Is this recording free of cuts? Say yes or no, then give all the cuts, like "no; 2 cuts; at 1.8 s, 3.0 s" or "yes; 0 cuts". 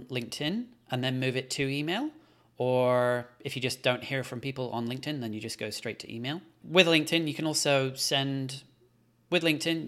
yes; 0 cuts